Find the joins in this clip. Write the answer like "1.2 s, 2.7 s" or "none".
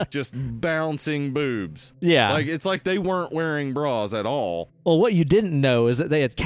none

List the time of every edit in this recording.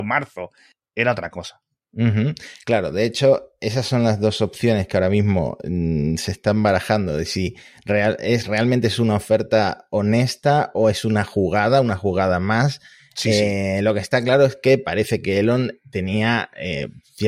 none

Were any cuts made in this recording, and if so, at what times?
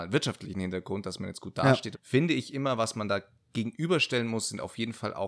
1.9 s

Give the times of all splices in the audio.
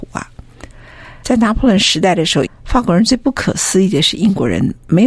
1.2 s, 2.5 s

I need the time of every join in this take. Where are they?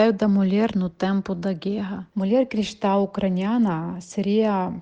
2.1 s

